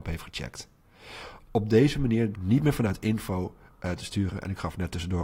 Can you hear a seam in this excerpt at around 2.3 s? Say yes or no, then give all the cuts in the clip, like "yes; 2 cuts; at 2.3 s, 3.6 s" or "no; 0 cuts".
yes; 1 cut; at 2.3 s